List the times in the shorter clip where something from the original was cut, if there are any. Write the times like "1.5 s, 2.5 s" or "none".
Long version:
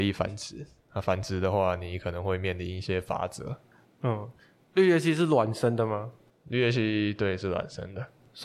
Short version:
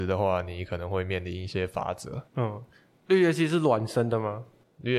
2.3 s